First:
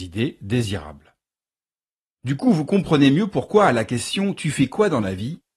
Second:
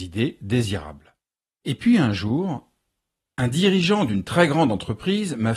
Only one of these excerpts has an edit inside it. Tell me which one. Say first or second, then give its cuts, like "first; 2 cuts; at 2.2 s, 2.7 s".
second; 1 cut; at 1.6 s